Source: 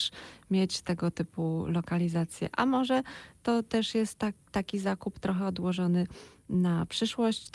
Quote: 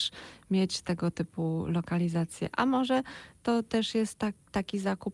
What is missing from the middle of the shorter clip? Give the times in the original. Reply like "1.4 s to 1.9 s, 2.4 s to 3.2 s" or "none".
none